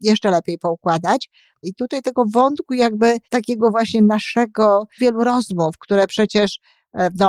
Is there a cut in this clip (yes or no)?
yes